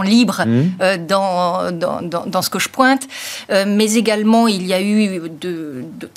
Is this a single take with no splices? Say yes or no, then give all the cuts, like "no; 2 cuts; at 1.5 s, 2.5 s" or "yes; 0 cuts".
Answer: yes; 0 cuts